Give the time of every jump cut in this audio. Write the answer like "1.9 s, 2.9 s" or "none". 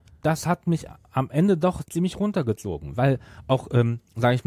none